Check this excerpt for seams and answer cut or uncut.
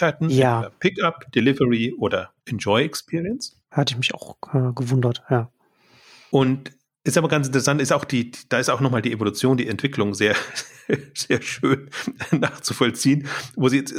uncut